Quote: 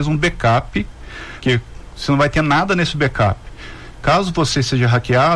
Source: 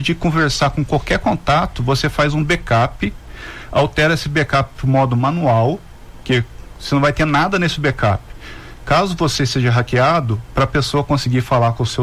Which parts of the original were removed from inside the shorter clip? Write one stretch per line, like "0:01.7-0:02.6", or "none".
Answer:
0:03.7-0:06.2

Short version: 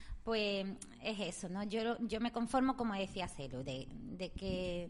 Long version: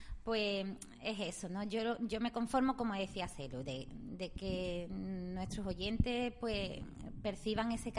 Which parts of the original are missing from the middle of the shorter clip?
none

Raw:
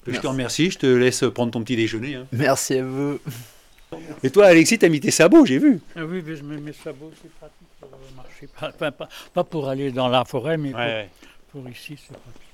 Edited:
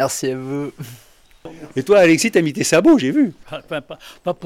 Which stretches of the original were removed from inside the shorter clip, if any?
0:05.9-0:08.5

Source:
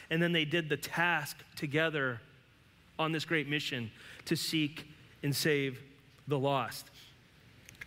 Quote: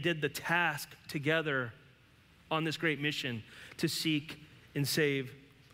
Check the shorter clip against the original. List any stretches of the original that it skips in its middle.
none

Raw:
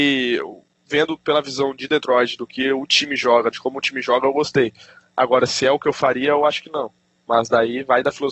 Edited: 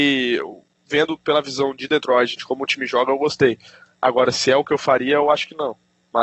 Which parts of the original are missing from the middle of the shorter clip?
0:02.4-0:03.5

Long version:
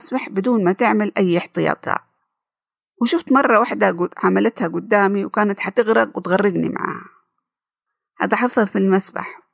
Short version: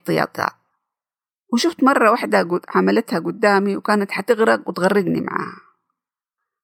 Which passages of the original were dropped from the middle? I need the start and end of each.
none

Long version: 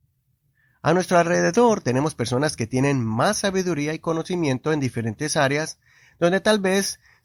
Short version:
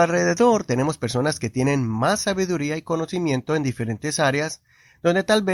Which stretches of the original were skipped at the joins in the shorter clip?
none

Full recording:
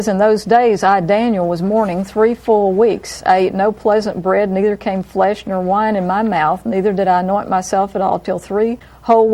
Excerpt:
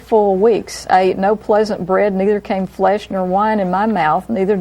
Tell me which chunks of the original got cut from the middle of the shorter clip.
none

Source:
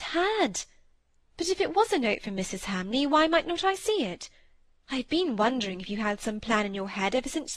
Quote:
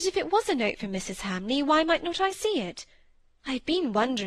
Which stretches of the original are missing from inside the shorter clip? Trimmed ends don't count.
none

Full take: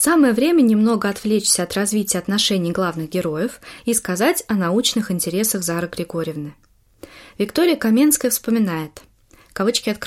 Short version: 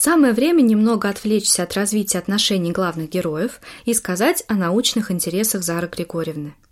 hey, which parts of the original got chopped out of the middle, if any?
none

